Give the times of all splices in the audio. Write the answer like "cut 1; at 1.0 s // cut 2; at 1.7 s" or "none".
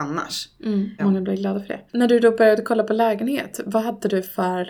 cut 1; at 1.0 s

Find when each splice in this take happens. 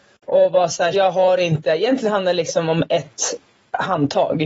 cut 1; at 0.9 s

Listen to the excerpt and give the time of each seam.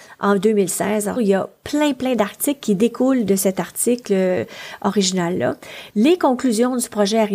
cut 1; at 1.2 s // cut 2; at 5.9 s

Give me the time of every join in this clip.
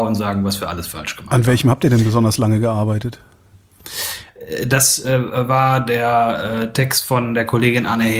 none

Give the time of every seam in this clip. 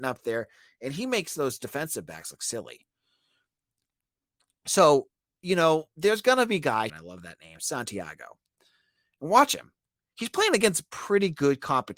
cut 1; at 6.9 s

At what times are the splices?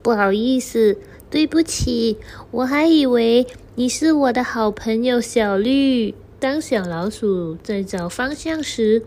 cut 1; at 6.3 s

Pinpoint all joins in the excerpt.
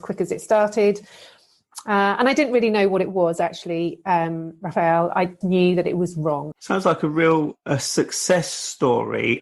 cut 1; at 5.4 s // cut 2; at 6.5 s

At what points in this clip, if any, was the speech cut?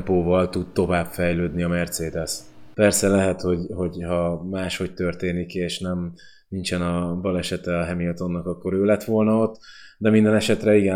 cut 1; at 2.7 s

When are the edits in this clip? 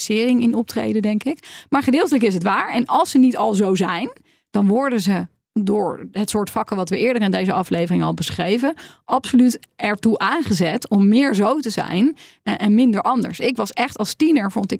none

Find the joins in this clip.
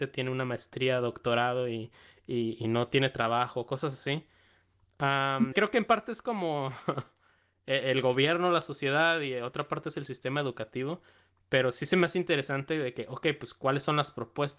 cut 1; at 5.5 s

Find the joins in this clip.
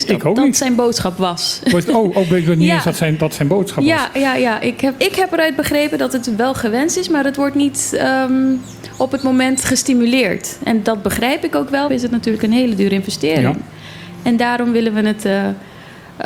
cut 1; at 5.0 s // cut 2; at 11.9 s

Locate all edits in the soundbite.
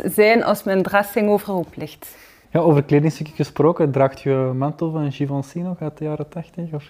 cut 1; at 2.4 s

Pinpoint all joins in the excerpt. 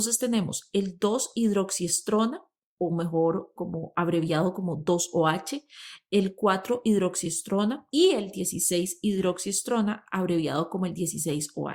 cut 1; at 3.6 s // cut 2; at 7.9 s

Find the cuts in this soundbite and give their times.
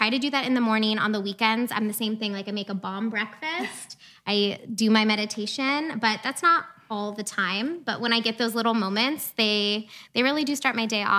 none

